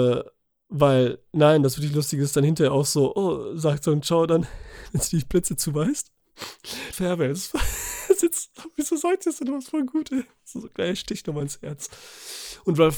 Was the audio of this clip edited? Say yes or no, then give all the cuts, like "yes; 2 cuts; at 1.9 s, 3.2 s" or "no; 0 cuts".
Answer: yes; 1 cut; at 6.9 s